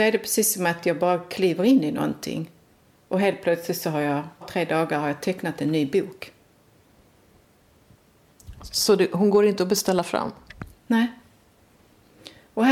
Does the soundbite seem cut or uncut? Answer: cut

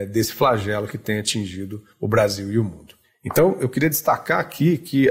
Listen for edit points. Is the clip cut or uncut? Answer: uncut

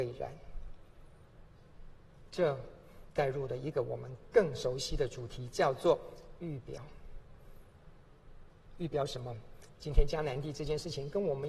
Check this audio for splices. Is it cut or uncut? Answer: uncut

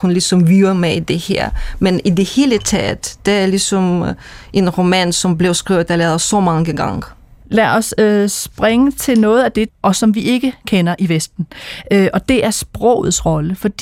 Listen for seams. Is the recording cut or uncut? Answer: cut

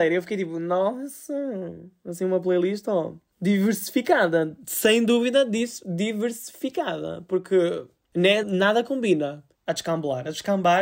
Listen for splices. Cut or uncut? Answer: cut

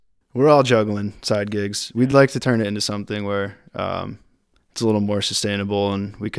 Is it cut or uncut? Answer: uncut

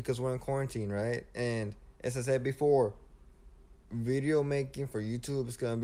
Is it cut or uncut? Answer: cut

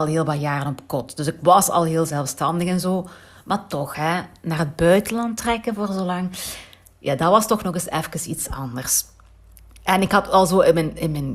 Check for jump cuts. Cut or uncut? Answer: uncut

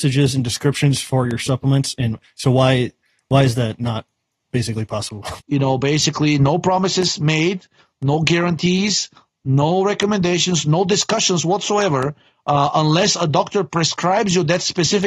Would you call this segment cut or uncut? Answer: cut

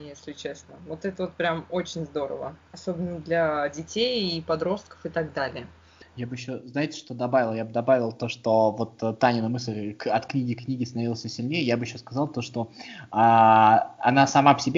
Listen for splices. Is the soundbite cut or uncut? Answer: cut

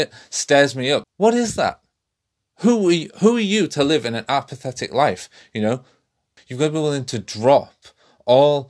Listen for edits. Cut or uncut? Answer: cut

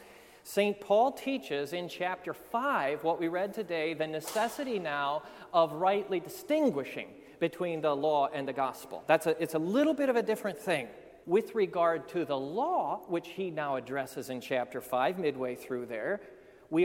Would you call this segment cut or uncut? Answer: cut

